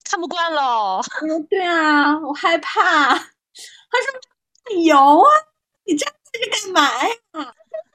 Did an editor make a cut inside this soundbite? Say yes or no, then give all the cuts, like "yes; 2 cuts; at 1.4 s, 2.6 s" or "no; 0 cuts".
no; 0 cuts